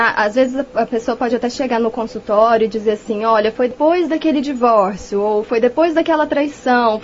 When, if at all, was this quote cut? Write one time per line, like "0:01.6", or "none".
none